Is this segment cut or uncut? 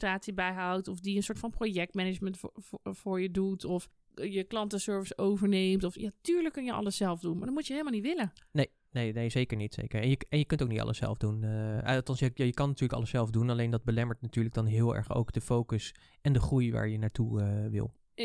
uncut